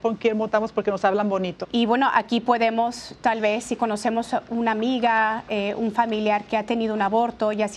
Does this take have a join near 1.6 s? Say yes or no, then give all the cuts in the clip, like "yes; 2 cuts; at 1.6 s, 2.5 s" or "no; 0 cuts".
yes; 1 cut; at 1.6 s